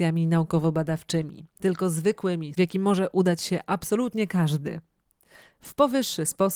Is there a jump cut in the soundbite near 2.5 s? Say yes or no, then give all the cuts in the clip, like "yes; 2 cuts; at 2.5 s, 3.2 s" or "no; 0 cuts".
yes; 1 cut; at 2.5 s